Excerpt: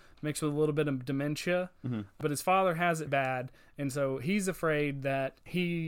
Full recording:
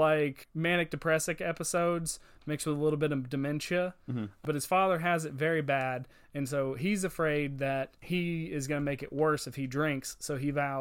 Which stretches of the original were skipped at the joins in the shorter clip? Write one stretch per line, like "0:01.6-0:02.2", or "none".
0:05.3-0:05.6